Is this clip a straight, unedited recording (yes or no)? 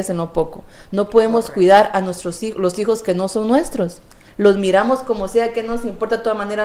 yes